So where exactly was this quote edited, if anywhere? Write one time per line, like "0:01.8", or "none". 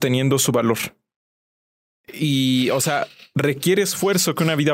none